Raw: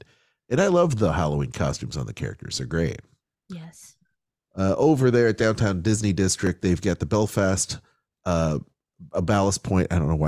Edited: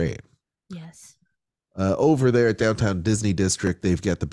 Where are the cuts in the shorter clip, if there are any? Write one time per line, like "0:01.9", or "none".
none